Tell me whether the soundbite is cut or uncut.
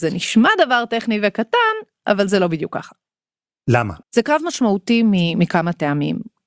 cut